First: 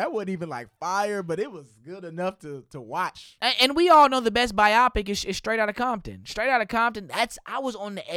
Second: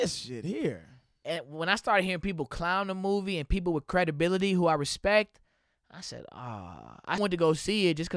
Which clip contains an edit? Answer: second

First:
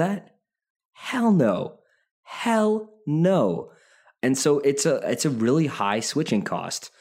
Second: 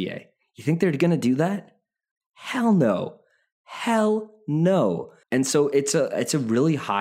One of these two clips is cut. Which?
second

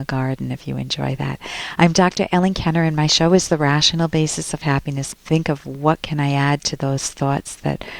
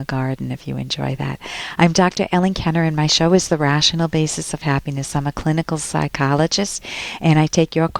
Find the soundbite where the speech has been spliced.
first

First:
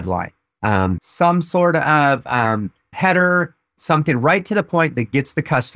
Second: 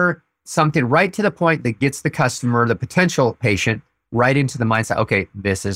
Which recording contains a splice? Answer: first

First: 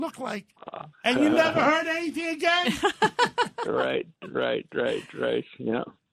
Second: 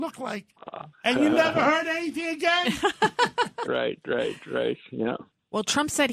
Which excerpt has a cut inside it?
second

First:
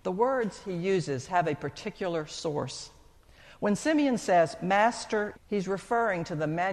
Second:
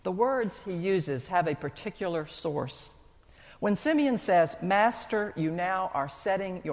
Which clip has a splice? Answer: first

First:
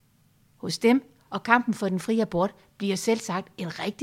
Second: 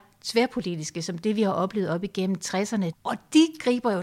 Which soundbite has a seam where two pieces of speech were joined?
second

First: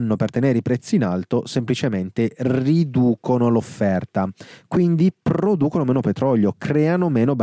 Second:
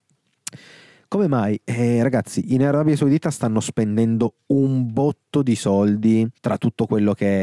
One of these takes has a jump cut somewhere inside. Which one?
second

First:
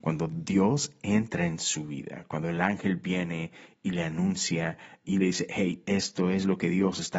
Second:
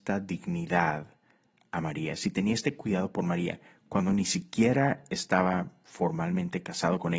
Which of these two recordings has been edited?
first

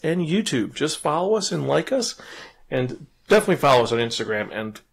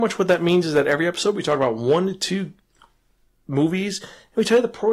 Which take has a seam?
first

